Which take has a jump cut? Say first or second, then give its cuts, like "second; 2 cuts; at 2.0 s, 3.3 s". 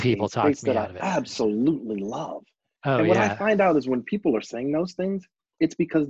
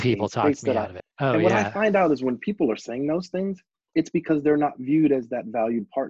second; 1 cut; at 1.0 s